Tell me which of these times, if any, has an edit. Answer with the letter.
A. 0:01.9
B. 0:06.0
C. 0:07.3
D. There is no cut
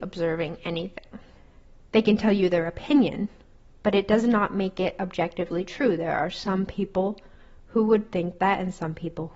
A